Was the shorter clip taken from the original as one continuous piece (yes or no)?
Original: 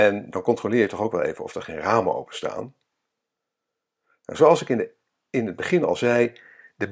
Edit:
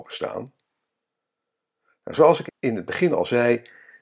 no